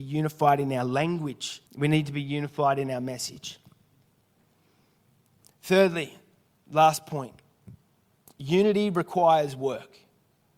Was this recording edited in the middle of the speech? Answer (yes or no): yes